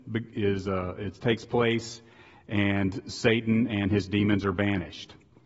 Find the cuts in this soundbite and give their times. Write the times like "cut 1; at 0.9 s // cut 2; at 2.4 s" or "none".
none